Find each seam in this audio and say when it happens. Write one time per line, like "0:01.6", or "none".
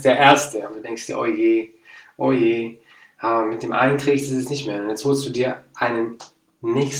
none